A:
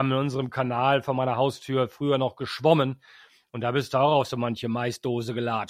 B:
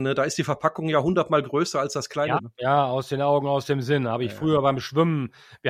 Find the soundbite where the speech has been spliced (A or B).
B